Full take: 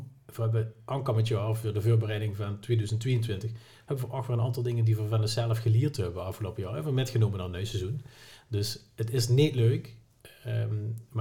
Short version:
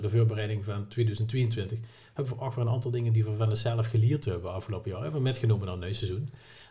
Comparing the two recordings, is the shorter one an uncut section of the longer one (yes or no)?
yes